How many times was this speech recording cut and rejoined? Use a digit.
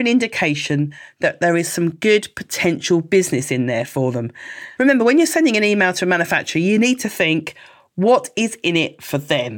1